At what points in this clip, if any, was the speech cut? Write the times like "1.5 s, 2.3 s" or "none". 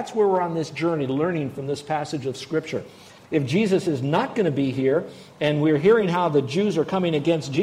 3.2 s